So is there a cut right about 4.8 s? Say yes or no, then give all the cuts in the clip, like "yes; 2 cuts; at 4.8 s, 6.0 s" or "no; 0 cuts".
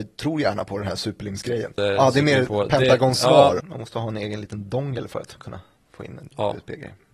no; 2 cuts; at 1.8 s, 3.6 s